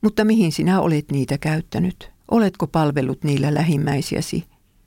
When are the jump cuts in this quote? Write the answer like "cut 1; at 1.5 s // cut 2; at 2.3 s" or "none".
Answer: cut 1; at 2.2 s